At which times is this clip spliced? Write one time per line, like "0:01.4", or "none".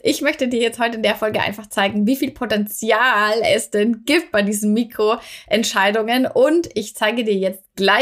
none